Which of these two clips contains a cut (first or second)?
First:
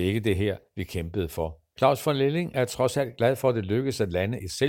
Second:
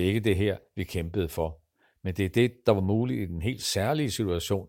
first